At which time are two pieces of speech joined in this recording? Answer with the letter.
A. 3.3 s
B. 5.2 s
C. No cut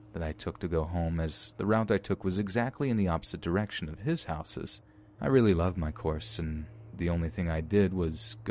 B